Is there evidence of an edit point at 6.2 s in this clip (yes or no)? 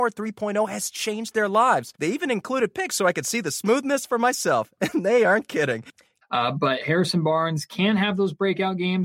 yes